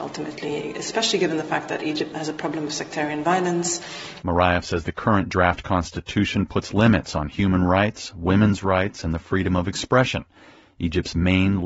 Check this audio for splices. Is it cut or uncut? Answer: cut